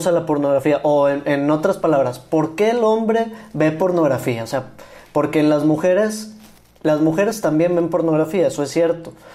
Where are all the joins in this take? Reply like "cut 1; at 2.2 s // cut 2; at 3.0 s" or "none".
none